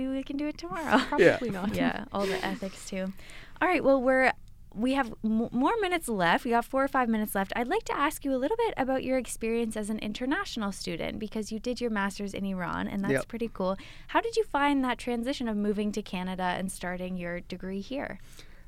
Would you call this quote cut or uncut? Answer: uncut